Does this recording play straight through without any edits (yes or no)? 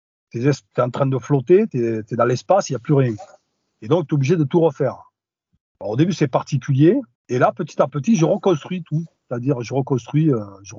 yes